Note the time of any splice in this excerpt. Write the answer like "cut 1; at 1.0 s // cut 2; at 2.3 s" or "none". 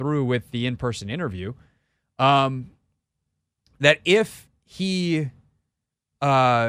none